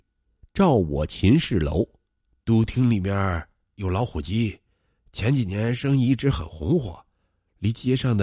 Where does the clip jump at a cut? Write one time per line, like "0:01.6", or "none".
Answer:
0:02.4